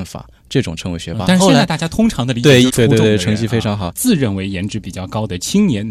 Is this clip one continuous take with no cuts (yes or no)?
no